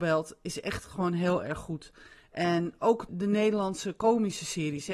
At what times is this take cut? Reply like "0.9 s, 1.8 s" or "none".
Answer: 3.1 s